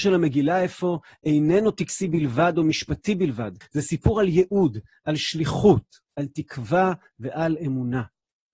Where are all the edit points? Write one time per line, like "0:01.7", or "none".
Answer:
0:03.6